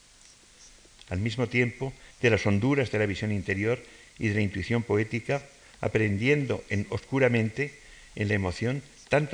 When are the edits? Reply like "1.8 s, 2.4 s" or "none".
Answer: 2.1 s